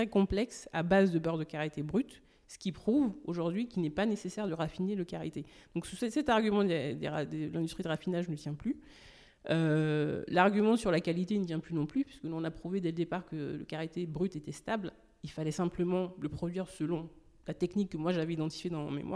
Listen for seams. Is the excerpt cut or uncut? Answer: uncut